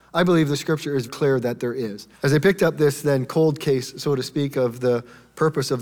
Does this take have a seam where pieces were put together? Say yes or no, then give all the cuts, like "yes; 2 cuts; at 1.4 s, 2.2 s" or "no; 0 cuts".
yes; 2 cuts; at 1.1 s, 2.1 s